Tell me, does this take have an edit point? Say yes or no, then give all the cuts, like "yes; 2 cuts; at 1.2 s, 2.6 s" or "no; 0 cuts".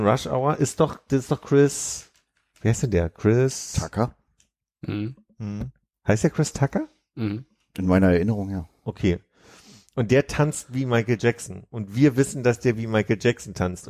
no; 0 cuts